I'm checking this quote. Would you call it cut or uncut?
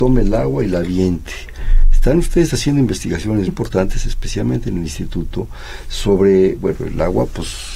cut